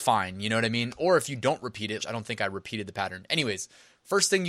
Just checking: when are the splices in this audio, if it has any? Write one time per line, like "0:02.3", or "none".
0:02.0

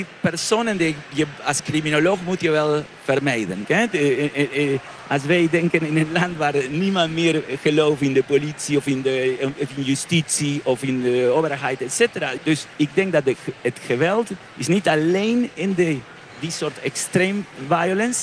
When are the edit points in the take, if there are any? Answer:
0:03.6
0:12.4

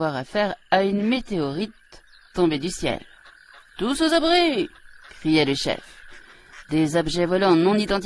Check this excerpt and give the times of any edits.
none

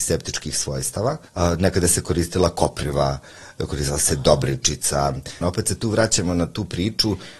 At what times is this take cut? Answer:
0:01.3
0:05.4

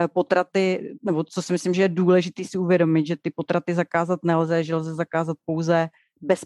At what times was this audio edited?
none

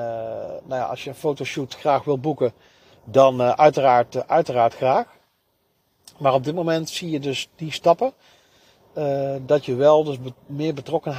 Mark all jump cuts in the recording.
none

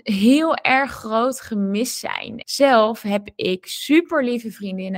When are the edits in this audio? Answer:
0:02.4

